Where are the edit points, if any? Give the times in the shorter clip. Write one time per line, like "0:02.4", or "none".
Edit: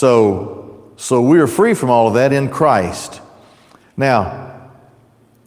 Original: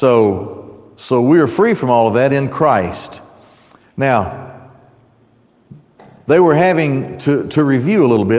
none